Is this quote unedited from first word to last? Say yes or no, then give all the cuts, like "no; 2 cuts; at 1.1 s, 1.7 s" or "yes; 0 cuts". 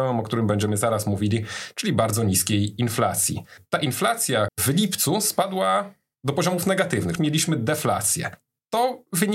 no; 2 cuts; at 4.5 s, 7.2 s